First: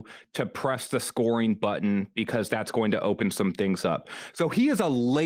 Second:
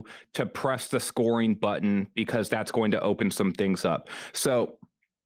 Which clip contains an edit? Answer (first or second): first